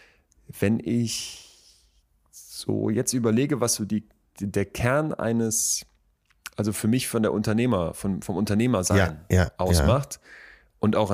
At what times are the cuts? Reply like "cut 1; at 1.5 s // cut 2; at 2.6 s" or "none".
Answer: none